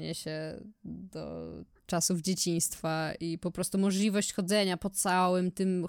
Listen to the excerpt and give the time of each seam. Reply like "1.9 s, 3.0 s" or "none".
none